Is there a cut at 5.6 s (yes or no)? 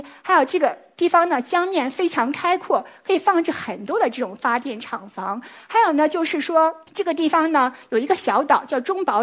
no